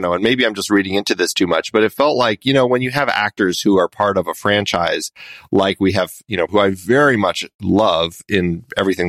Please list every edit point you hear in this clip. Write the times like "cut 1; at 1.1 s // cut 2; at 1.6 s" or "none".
cut 1; at 6.5 s